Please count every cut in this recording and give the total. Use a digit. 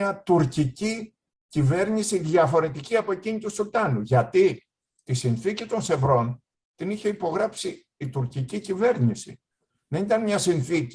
0